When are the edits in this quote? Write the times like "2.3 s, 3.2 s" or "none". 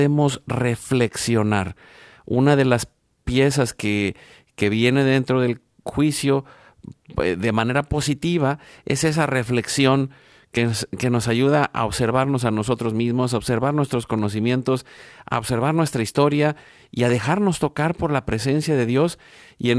none